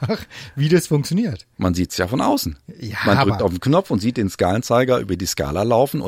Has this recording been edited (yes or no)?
no